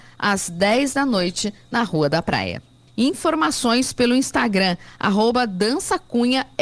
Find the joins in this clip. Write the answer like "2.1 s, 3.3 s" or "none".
2.9 s